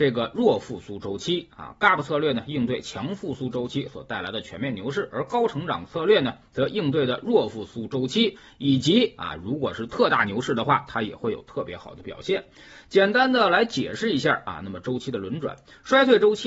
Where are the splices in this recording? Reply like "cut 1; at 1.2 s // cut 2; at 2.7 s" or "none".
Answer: none